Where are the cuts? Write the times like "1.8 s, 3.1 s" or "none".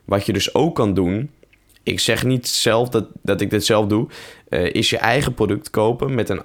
none